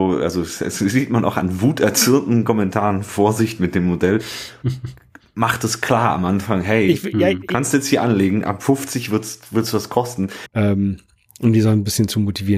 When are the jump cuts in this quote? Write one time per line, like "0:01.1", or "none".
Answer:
0:10.5